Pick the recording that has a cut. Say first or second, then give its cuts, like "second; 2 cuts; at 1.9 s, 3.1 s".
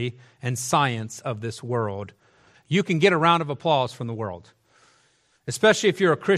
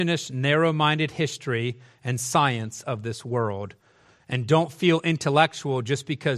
first; 1 cut; at 2.5 s